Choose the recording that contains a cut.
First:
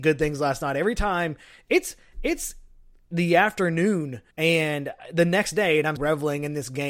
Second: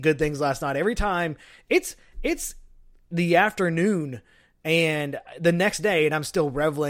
first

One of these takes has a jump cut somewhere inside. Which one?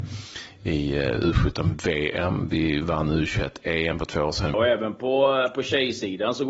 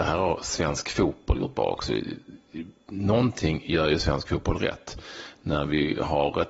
first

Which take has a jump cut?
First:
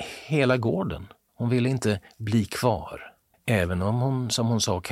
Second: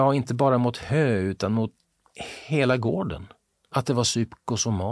first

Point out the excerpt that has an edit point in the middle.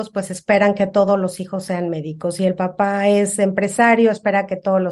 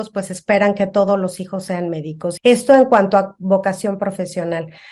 second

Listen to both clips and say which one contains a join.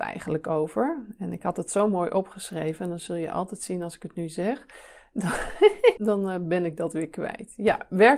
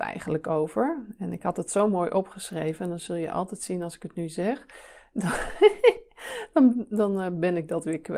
first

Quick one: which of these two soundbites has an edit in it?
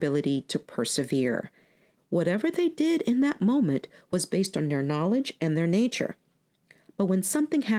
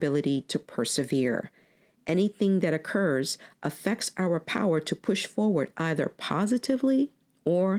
first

